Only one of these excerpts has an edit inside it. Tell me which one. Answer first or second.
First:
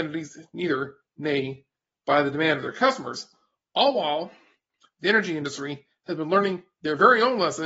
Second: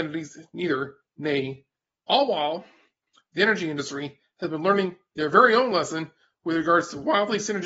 second